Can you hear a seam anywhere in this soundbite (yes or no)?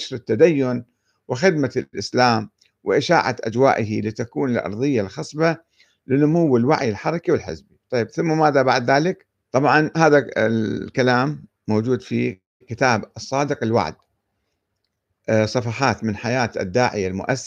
yes